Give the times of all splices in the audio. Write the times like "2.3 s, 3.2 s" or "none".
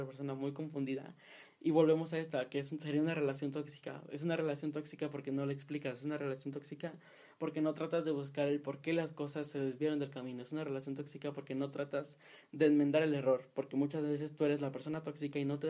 none